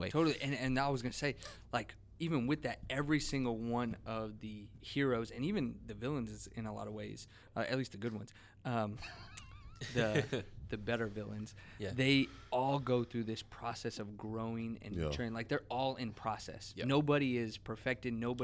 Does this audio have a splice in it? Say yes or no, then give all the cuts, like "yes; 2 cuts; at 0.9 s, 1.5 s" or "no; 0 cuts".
no; 0 cuts